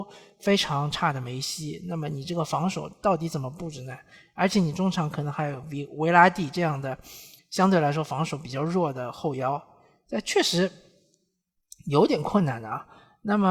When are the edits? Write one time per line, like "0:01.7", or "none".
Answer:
none